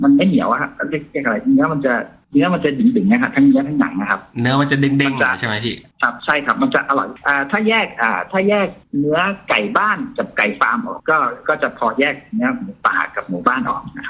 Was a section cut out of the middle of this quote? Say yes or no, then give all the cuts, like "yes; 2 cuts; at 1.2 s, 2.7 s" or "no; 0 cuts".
yes; 1 cut; at 11.0 s